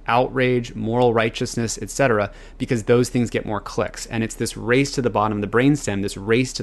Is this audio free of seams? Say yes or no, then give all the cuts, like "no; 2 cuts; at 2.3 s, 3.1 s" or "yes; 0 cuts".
yes; 0 cuts